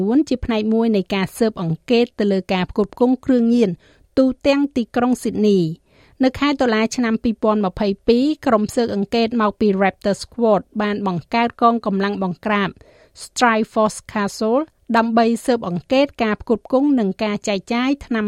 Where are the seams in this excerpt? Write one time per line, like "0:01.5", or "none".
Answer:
none